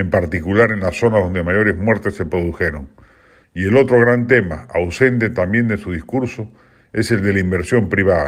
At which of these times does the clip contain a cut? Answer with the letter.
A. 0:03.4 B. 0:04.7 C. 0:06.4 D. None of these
A